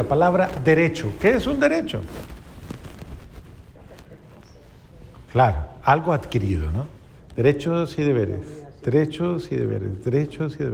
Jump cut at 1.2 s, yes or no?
no